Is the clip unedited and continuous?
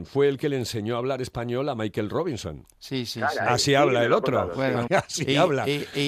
no; 2 cuts; at 2.7 s, 4.9 s

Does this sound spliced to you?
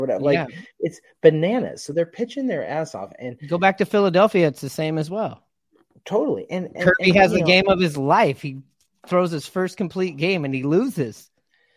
no; 0 cuts

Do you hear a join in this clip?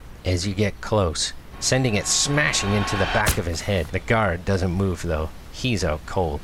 yes; 2 cuts; at 1.5 s, 3.9 s

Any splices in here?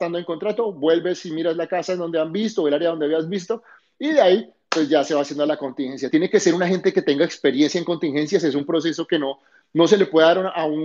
no; 0 cuts

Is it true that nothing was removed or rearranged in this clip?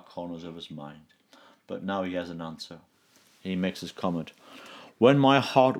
yes; 0 cuts

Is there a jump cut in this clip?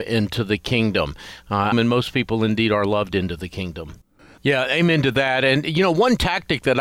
yes; 2 cuts; at 1.7 s, 4.4 s

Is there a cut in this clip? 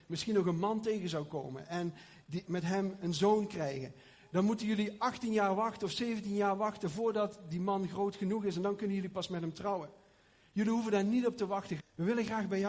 yes; 2 cuts; at 2.4 s, 11.8 s

